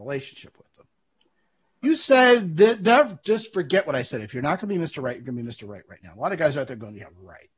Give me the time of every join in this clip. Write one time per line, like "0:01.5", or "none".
0:01.8